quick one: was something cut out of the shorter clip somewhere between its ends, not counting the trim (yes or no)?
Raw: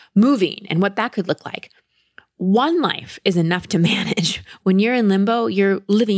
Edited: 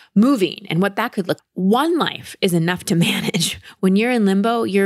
yes